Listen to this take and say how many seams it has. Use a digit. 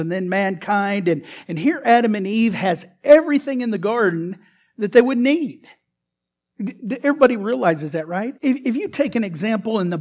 1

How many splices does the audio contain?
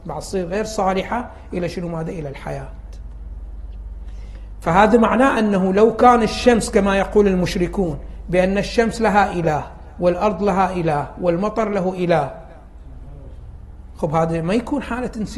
0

